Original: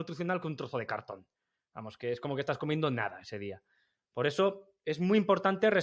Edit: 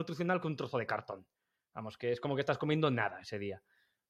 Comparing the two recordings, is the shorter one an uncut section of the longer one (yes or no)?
yes